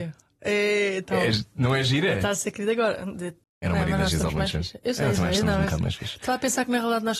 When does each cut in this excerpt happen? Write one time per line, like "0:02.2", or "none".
0:03.4